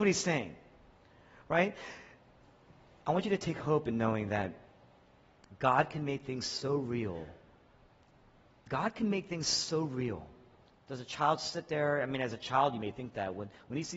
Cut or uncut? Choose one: cut